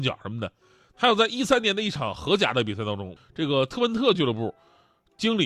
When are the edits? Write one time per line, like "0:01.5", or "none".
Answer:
0:00.9
0:03.2